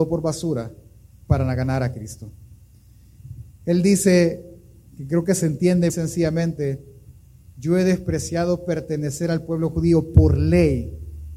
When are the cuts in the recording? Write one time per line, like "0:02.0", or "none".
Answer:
0:05.9
0:07.5